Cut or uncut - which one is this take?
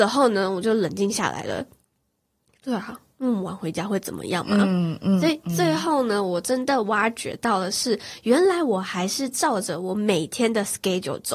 uncut